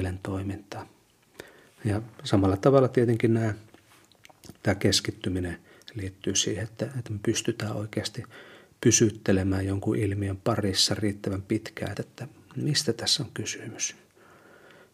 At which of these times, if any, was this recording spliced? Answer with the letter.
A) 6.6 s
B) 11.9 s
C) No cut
B